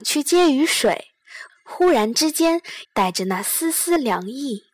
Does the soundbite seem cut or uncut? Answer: cut